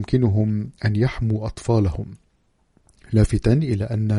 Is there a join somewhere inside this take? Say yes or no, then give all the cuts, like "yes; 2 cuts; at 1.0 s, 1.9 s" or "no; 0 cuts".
no; 0 cuts